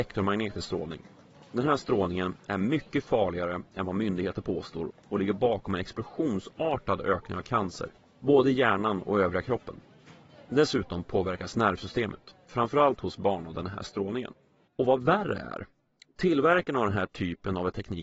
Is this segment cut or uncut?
cut